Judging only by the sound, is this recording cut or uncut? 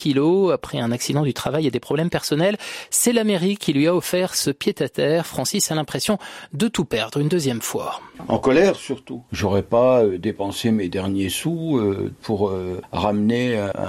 cut